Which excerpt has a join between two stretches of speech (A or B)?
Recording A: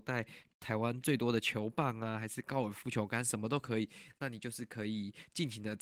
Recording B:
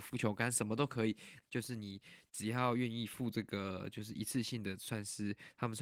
B